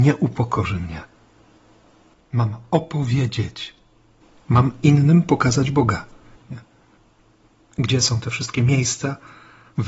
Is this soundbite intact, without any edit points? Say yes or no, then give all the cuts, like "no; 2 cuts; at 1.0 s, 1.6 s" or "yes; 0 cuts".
no; 2 cuts; at 2.1 s, 6.4 s